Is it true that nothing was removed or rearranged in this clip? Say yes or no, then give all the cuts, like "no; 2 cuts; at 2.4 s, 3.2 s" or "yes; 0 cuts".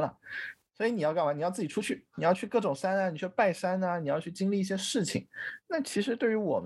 yes; 0 cuts